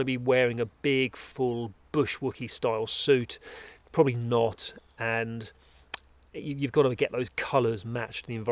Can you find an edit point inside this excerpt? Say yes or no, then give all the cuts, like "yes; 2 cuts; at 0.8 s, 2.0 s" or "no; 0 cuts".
no; 0 cuts